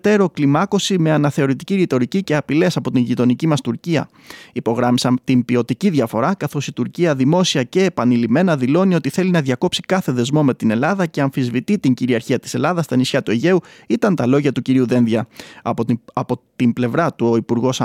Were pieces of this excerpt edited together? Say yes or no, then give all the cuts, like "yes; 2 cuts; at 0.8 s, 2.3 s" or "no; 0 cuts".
no; 0 cuts